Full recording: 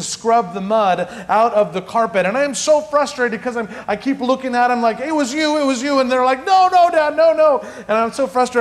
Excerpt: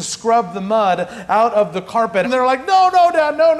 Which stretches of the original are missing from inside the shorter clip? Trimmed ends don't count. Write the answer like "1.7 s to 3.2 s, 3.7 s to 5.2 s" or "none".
2.2 s to 6.0 s